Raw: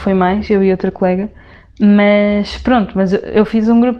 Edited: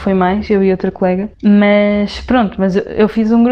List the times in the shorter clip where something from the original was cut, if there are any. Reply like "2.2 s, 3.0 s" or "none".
1.3 s